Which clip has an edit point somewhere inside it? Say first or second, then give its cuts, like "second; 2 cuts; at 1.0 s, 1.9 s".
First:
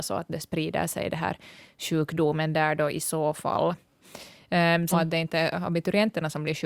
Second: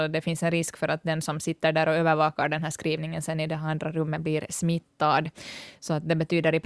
first; 1 cut; at 4.9 s